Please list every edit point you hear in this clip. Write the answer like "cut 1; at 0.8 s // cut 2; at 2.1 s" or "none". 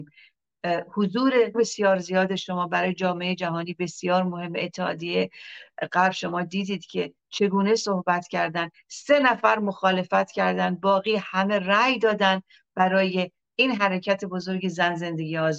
cut 1; at 1.5 s

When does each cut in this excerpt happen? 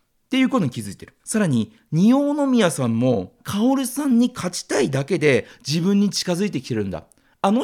cut 1; at 1.2 s // cut 2; at 3.4 s

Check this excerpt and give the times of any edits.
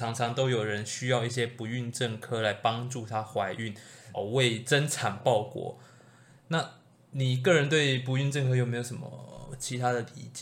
cut 1; at 4.1 s

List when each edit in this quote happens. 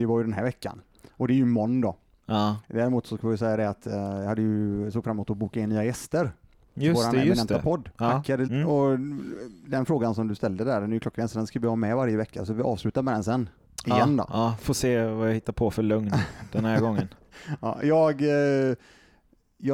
cut 1; at 8.5 s

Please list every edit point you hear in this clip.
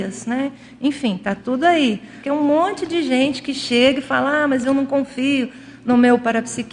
cut 1; at 2.2 s

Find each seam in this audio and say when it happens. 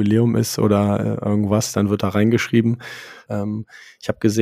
cut 1; at 3.3 s

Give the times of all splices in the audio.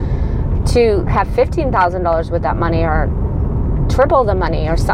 cut 1; at 1.1 s

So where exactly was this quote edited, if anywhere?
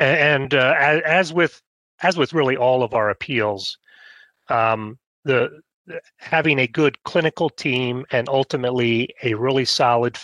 none

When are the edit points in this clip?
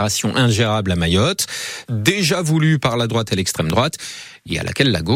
cut 1; at 1.8 s

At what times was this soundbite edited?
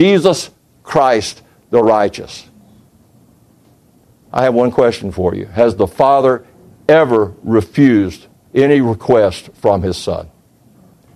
none

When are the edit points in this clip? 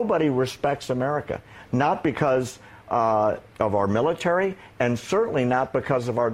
cut 1; at 3.5 s

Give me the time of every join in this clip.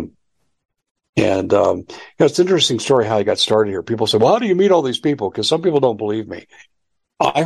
none

